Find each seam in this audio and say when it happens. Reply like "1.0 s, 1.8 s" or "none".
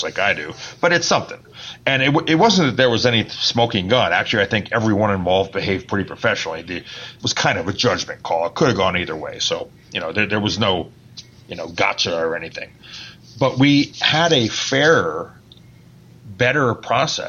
7.2 s